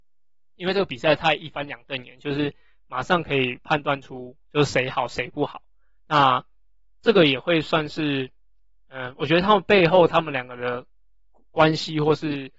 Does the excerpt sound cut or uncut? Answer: uncut